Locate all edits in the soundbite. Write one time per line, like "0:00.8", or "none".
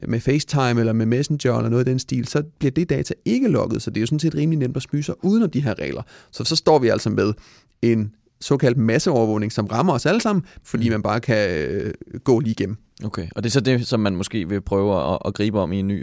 0:10.6